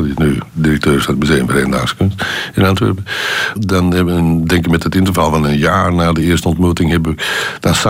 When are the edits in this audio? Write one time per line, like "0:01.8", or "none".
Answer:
0:03.6